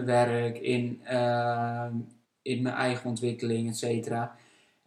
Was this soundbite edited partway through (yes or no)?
yes